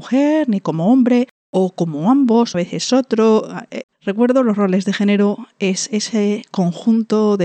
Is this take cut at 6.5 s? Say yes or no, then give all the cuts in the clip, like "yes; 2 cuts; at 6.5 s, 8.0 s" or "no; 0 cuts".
no; 2 cuts; at 2.5 s, 3.8 s